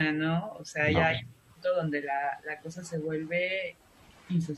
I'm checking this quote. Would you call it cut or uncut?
uncut